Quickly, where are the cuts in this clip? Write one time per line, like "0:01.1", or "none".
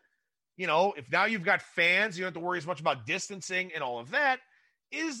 none